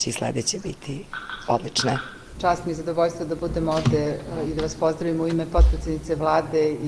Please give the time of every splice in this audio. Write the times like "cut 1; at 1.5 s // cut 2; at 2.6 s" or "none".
cut 1; at 2.4 s